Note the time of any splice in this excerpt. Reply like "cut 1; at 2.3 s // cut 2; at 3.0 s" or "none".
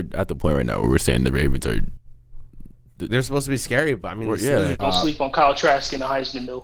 cut 1; at 3.1 s // cut 2; at 4.7 s